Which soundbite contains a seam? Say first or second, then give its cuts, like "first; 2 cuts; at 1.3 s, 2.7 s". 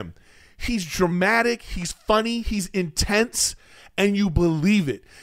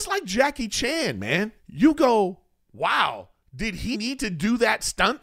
second; 2 cuts; at 1.6 s, 3.9 s